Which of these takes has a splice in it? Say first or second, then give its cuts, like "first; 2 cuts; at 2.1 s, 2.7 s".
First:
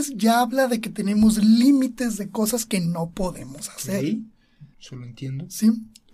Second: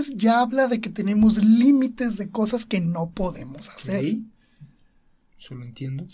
first; 1 cut; at 4.7 s